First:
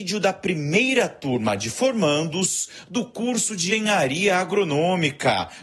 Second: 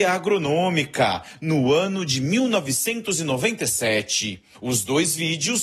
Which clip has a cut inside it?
first; 1 cut; at 3.7 s

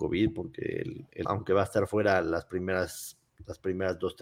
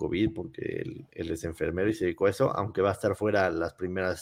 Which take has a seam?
first; 1 cut; at 1.2 s

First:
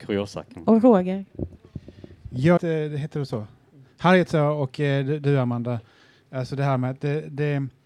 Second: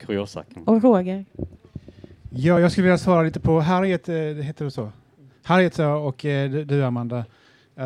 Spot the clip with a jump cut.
first; 1 cut; at 2.6 s

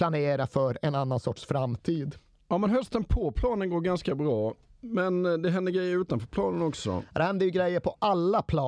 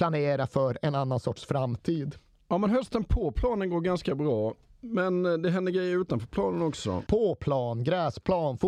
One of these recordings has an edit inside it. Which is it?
second; 1 cut; at 7.1 s

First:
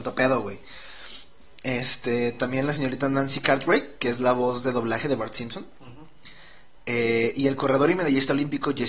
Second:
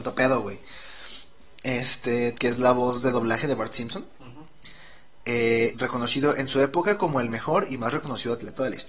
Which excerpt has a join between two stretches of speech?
second; 2 cuts; at 2.3 s, 5.7 s

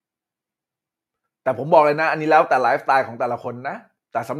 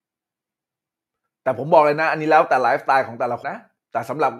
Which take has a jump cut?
second; 1 cut; at 3.4 s

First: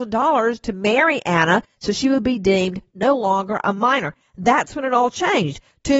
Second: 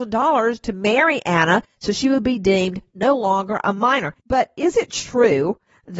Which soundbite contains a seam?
second; 1 cut; at 4.2 s

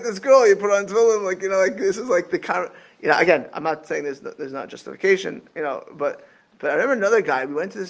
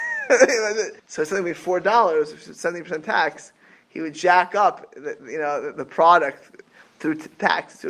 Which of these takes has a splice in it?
second; 2 cuts; at 1.0 s, 5.7 s

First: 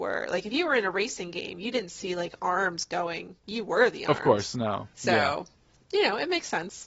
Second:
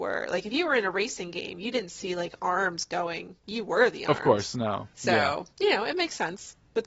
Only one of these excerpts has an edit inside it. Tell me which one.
second; 1 cut; at 5.5 s

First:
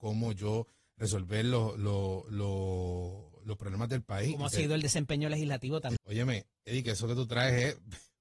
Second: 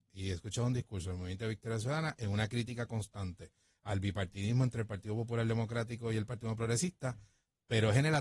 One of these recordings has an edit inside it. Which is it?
first; 1 cut; at 6.0 s

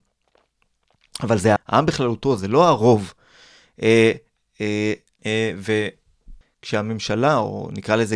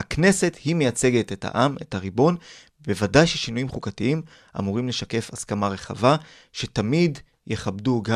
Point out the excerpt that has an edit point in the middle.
first; 3 cuts; at 1.6 s, 5.2 s, 6.4 s

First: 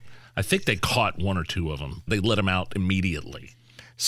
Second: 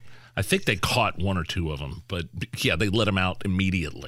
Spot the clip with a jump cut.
first; 1 cut; at 2.1 s

